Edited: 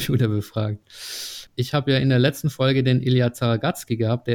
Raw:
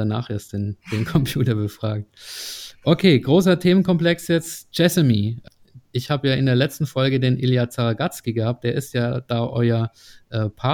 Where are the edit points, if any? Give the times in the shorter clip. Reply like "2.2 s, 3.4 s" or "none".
1.5 s